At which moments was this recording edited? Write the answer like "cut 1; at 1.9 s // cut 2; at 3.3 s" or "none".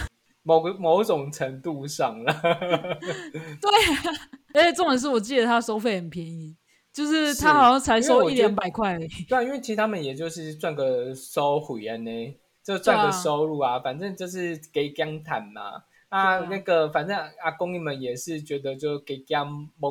none